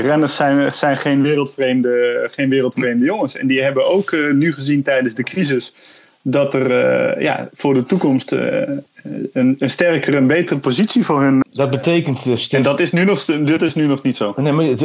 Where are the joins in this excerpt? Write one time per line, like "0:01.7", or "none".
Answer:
0:11.4